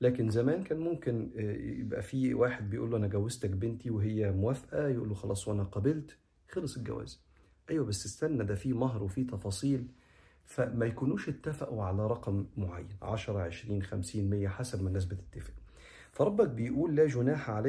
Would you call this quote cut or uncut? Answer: uncut